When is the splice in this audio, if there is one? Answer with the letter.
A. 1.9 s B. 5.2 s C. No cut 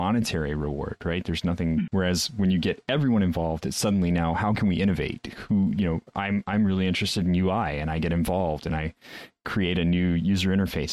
A